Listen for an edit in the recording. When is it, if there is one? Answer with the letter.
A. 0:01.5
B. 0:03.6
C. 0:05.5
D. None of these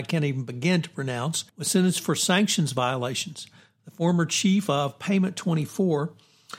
A